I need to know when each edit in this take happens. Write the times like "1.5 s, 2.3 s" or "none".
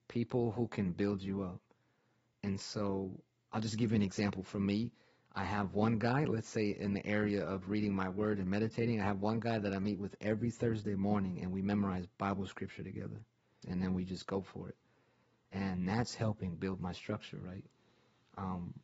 13.6 s